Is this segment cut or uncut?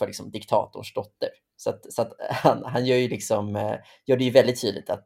uncut